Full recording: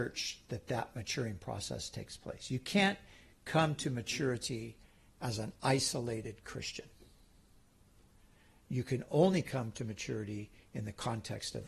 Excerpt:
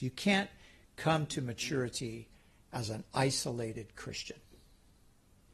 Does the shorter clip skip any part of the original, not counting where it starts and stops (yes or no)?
no